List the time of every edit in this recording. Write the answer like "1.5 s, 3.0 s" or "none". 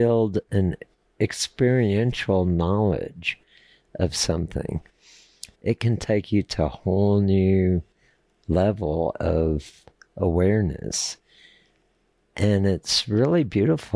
5.5 s